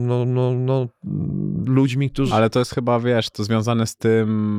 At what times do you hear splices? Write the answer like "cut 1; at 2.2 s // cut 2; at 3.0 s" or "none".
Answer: cut 1; at 2.3 s